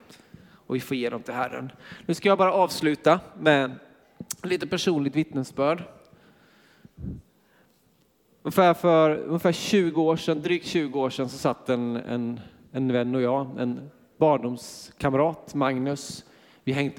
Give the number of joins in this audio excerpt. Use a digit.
0